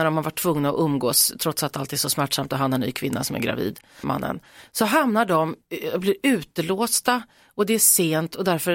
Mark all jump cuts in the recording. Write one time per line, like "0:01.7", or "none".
0:04.0